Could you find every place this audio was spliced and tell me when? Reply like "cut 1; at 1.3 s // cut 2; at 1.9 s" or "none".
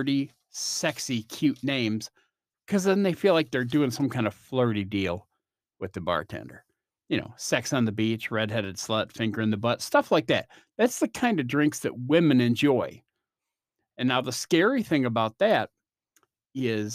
none

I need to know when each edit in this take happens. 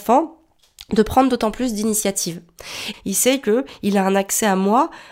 cut 1; at 2.9 s

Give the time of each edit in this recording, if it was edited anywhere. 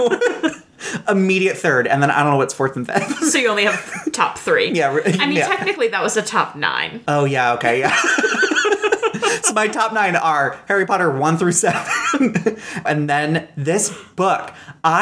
cut 1; at 12.9 s

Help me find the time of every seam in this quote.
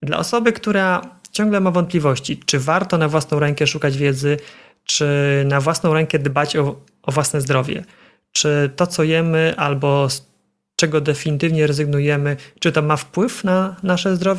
none

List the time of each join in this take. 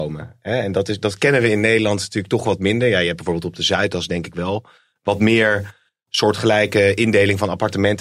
none

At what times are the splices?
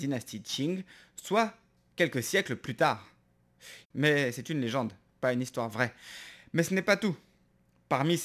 cut 1; at 3.8 s

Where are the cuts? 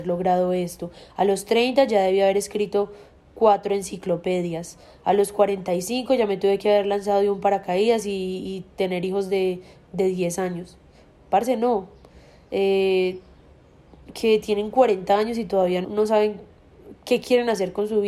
cut 1; at 14.1 s // cut 2; at 15.8 s

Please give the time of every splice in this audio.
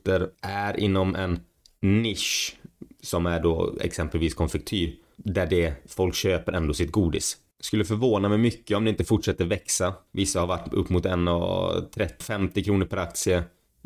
cut 1; at 7.5 s // cut 2; at 10.1 s // cut 3; at 12.2 s

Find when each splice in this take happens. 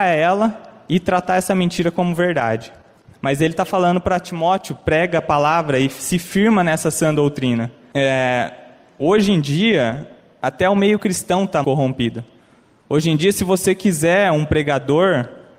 cut 1; at 11.6 s

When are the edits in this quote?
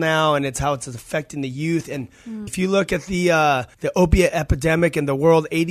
cut 1; at 2.5 s // cut 2; at 3.7 s

